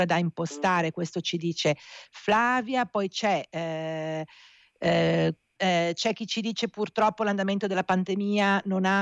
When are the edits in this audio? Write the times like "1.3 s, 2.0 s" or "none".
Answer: 5.6 s